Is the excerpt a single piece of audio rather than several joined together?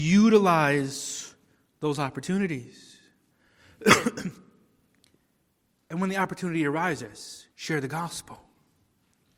no; 2 cuts; at 3.3 s, 7.5 s

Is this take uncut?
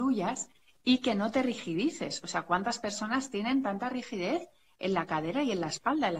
yes; 0 cuts

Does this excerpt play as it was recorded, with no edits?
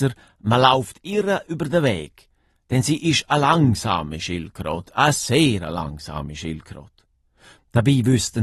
yes; 0 cuts

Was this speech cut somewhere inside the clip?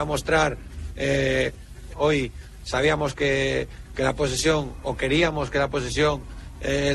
yes; 1 cut; at 1.9 s

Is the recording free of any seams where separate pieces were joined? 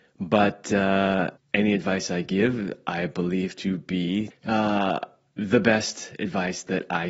no; 2 cuts; at 1.4 s, 4.3 s

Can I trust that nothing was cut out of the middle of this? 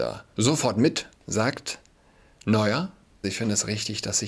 no; 1 cut; at 3.2 s

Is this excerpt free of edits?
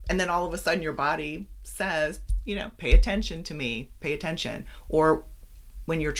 yes; 0 cuts

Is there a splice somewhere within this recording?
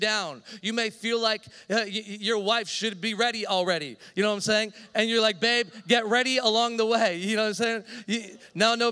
no; 0 cuts

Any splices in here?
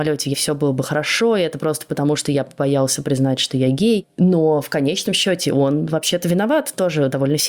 no; 0 cuts

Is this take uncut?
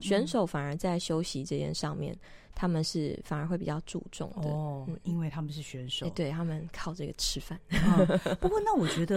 yes; 0 cuts

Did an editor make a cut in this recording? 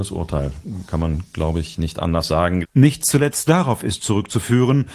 yes; 1 cut; at 2.6 s

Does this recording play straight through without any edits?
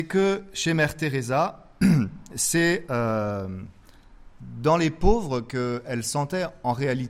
yes; 0 cuts

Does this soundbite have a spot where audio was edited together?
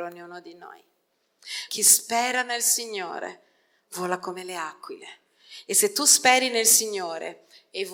yes; 1 cut; at 1.7 s

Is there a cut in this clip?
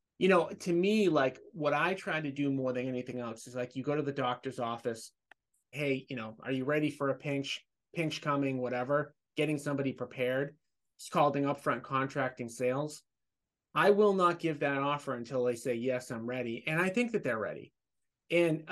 yes; 1 cut; at 5.7 s

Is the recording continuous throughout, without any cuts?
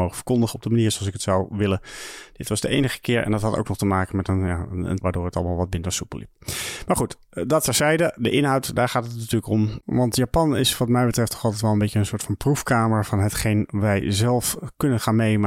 no; 1 cut; at 5.0 s

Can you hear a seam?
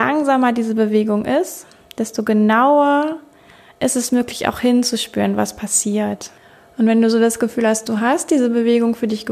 no; 0 cuts

